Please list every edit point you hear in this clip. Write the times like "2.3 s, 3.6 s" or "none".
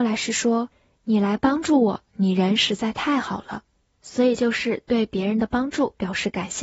none